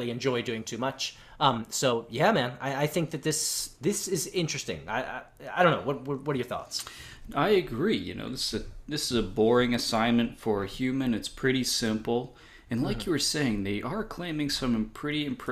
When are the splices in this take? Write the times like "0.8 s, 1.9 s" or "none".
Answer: none